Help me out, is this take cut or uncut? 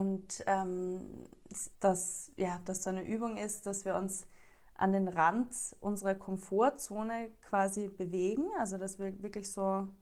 cut